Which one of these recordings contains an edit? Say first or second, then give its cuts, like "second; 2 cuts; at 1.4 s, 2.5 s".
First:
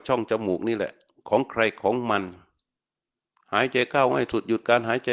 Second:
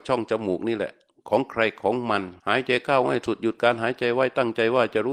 second; 1 cut; at 2.4 s